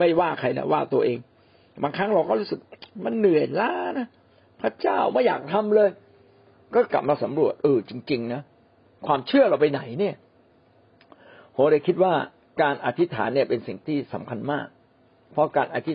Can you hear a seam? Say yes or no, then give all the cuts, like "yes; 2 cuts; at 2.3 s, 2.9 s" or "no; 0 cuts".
no; 0 cuts